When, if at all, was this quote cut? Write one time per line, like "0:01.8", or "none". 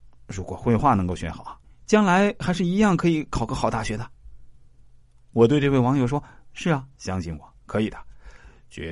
0:07.0